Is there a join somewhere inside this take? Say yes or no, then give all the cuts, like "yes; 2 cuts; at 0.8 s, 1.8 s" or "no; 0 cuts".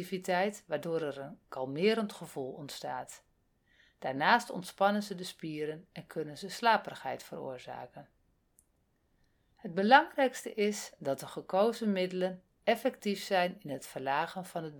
no; 0 cuts